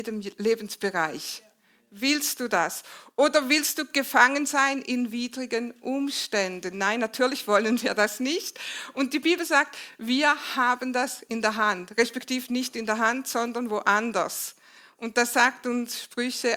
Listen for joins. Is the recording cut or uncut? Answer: uncut